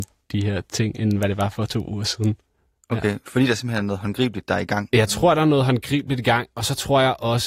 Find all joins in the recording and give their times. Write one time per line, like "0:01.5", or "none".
none

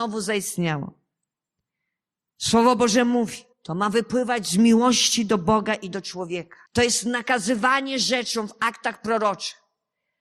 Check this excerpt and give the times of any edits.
0:03.5
0:06.7

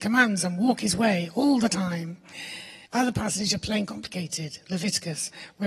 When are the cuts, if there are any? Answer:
0:02.8

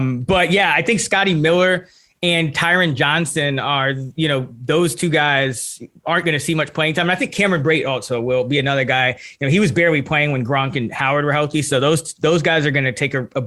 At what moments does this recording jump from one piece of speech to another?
none

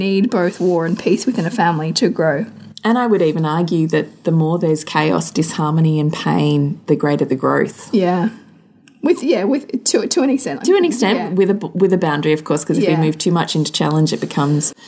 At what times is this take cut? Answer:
none

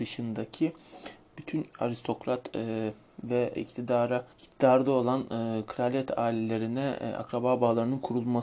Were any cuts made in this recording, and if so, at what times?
0:04.3

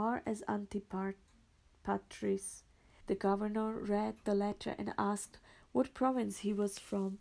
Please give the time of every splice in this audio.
0:03.0

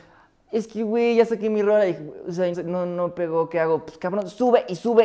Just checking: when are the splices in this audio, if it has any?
0:02.5

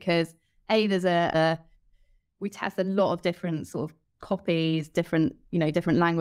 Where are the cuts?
0:01.3

